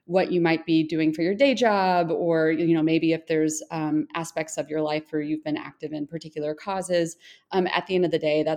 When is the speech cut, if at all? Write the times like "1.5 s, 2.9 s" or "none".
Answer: none